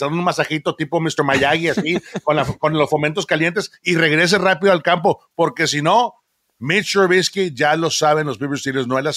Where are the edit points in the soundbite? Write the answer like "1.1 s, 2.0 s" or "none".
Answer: none